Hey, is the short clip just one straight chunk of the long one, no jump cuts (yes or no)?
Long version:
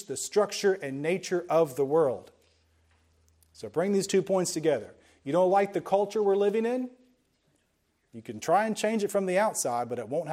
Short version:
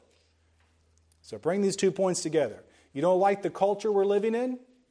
yes